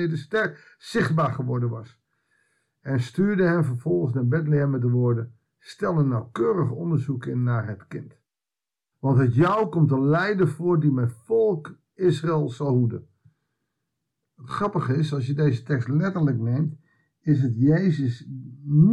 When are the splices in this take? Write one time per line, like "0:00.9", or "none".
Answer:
0:08.9